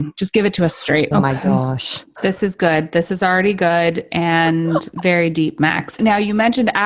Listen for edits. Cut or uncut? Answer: cut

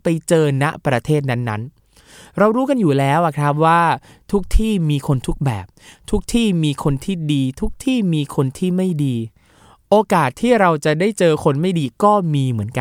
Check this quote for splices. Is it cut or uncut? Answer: uncut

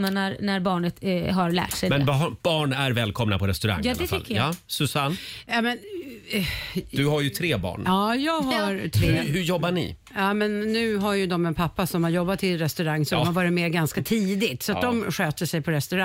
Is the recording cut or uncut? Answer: uncut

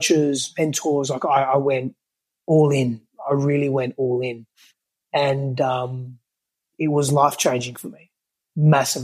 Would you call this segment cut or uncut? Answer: uncut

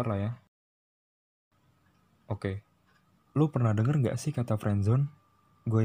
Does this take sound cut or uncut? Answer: cut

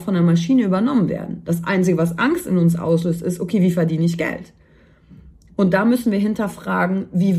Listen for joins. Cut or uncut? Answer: uncut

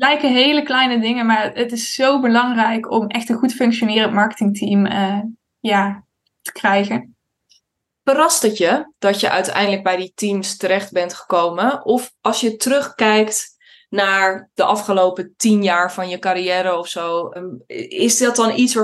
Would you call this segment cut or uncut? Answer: cut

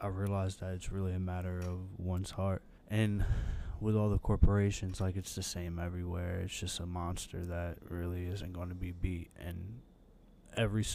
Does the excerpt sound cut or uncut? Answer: cut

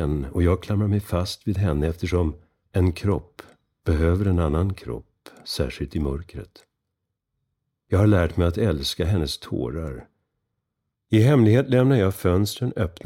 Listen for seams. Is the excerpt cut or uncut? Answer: cut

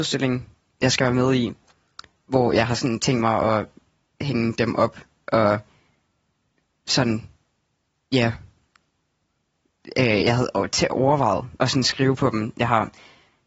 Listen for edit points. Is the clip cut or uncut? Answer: uncut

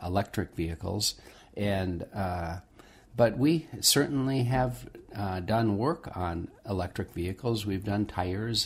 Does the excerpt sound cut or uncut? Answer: uncut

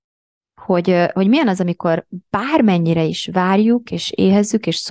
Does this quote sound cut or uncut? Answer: uncut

